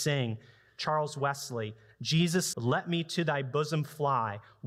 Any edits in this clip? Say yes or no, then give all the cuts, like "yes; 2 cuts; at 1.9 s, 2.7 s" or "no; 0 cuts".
yes; 1 cut; at 2.5 s